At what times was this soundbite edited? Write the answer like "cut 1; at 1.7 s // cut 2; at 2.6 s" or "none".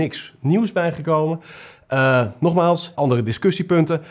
cut 1; at 2.9 s